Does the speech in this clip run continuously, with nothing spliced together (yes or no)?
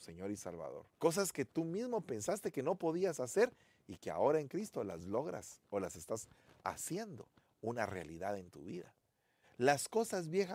no